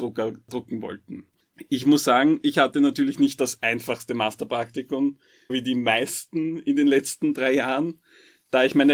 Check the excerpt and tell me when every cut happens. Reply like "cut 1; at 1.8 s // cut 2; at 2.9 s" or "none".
cut 1; at 5.5 s